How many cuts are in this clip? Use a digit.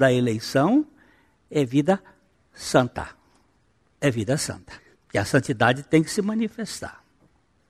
1